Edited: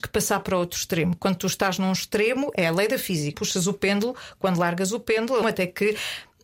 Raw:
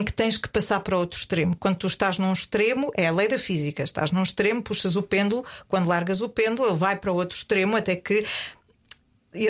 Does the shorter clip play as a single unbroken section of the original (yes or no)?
no